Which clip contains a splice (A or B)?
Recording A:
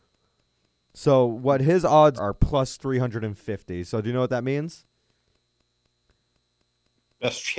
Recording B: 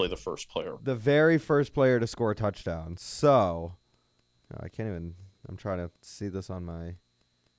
A